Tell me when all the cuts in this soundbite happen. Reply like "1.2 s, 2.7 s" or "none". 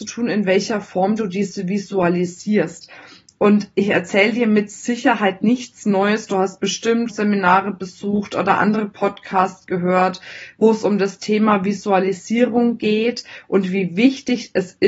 7.1 s